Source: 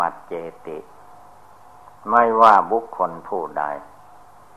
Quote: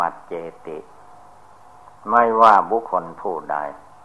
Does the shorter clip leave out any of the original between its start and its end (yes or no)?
yes